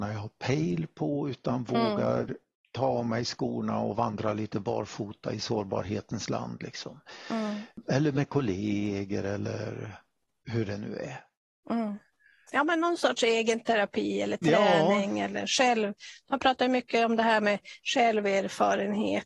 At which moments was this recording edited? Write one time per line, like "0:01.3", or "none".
none